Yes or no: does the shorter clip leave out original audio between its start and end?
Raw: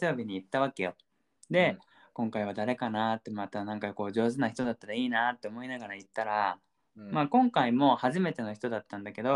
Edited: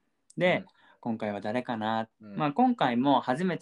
yes